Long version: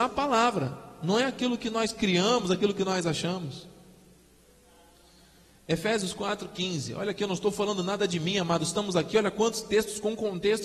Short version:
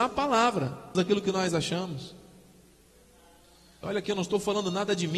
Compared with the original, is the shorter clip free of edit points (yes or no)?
no